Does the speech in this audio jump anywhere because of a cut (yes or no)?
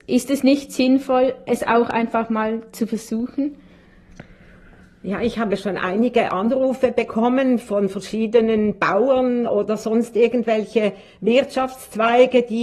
no